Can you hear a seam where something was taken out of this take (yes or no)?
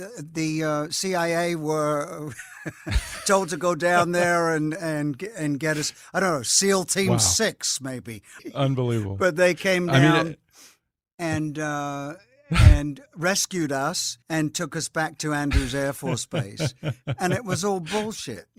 yes